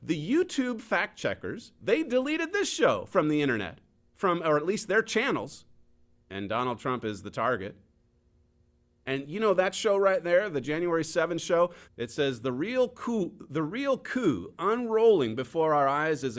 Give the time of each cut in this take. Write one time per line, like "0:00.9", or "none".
0:06.1
0:09.0
0:11.8